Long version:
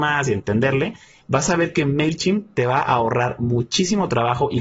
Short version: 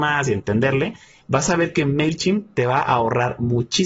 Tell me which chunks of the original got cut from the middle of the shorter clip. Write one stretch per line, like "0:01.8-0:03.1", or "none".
none